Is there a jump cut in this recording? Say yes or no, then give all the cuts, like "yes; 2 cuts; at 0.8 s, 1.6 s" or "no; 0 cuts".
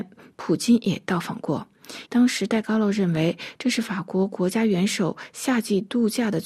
yes; 1 cut; at 2.0 s